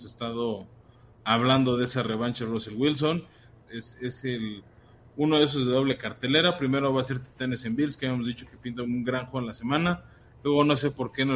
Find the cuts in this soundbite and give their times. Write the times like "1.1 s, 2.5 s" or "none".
3.7 s